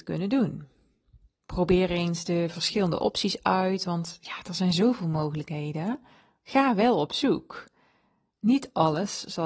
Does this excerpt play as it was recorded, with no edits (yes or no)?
yes